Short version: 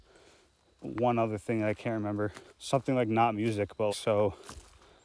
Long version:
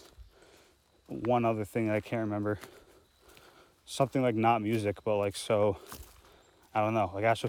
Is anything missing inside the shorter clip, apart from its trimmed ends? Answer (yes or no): yes